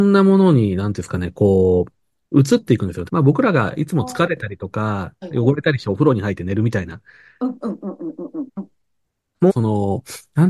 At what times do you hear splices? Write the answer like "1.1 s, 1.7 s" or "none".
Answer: 3.1 s, 8.5 s, 9.5 s